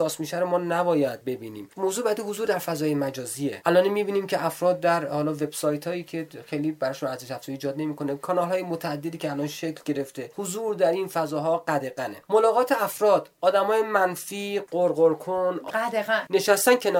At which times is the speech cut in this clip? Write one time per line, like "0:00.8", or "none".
0:15.7